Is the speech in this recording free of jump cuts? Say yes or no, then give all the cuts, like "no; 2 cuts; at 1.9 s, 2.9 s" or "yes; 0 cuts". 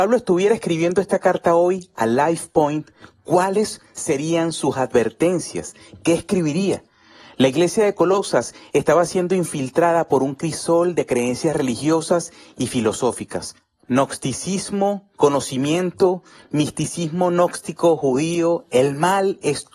yes; 0 cuts